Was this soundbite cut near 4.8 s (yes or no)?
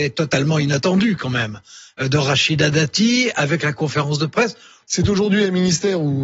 yes